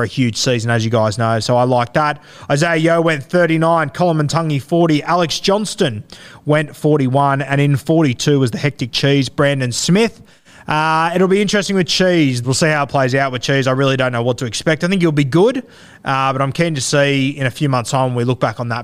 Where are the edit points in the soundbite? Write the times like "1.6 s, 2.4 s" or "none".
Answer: 12.4 s